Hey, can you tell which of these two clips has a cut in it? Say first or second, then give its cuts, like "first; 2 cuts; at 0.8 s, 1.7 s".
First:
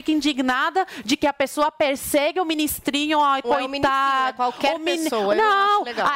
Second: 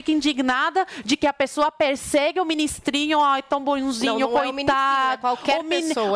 first; 1 cut; at 3.4 s